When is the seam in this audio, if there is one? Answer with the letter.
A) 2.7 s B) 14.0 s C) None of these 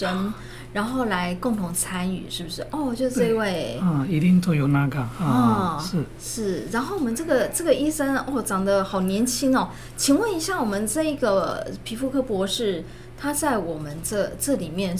C